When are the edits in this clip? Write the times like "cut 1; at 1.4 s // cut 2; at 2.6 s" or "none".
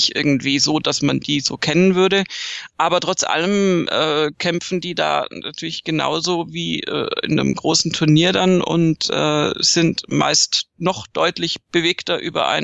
none